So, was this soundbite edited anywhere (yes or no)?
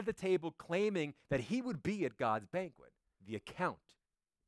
yes